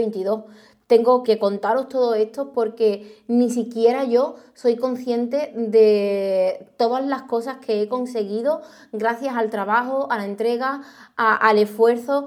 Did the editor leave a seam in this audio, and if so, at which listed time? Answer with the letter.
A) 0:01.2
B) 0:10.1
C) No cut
A